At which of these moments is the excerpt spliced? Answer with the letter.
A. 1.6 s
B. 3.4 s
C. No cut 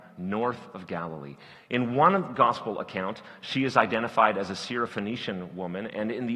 A